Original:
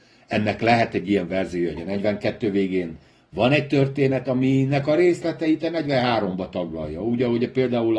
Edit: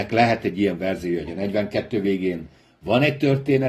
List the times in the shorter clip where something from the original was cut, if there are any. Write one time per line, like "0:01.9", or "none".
none